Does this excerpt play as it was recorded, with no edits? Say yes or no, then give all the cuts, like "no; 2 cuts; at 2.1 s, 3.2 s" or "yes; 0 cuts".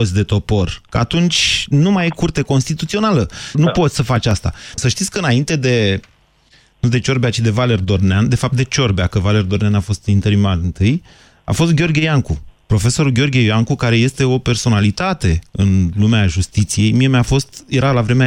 no; 2 cuts; at 3.5 s, 4.8 s